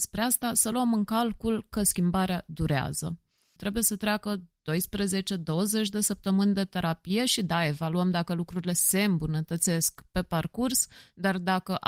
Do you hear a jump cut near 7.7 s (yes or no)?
no